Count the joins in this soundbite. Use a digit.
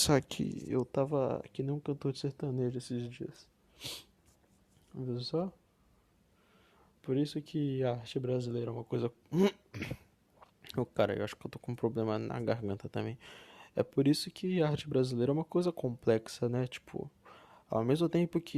0